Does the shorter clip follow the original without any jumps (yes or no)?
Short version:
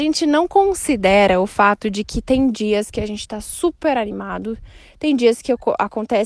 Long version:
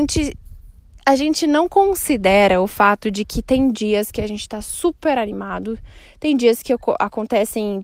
yes